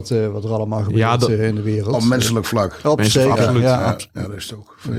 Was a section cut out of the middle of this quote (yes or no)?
no